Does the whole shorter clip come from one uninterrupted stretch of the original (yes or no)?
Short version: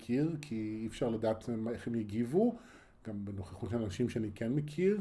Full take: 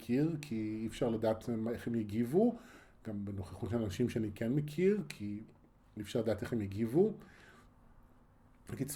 yes